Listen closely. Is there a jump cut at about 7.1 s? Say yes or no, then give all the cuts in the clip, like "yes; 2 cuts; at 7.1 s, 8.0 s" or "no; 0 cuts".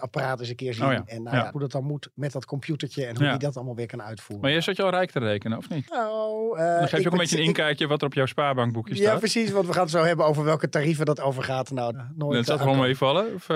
no; 3 cuts; at 1.5 s, 5.9 s, 11.9 s